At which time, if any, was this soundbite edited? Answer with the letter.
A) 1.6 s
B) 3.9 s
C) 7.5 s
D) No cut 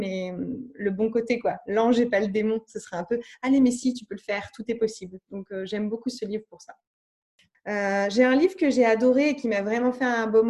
C